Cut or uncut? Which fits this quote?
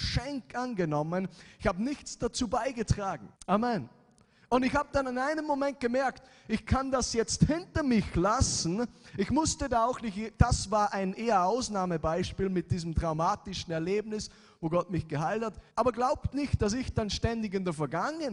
cut